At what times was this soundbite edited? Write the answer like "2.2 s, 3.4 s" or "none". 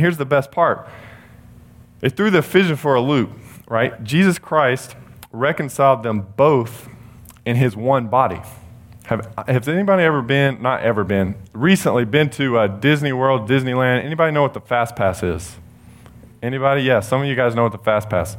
none